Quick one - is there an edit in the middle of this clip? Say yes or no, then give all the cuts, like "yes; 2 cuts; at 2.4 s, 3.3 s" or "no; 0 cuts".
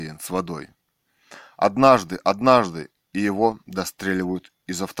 no; 0 cuts